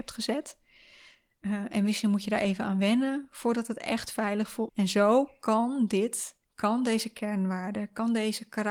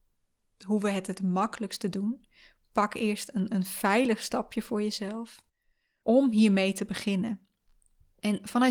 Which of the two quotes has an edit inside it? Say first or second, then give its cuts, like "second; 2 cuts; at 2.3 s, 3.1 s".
first; 2 cuts; at 4.7 s, 6.4 s